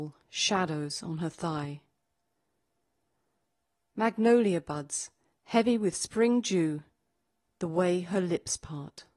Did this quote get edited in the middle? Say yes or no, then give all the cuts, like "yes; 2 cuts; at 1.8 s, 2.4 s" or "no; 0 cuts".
no; 0 cuts